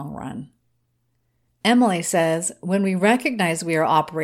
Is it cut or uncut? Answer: cut